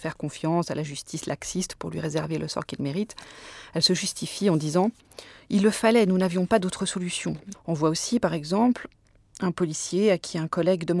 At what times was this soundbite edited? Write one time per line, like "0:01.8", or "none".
0:07.5